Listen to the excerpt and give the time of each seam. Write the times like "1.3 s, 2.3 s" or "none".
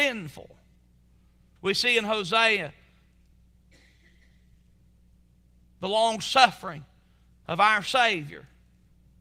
1.6 s